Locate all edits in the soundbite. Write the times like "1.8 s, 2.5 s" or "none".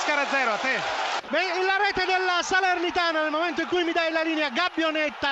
1.2 s